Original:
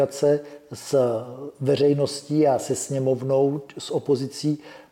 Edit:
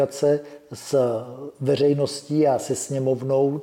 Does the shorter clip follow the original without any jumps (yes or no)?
yes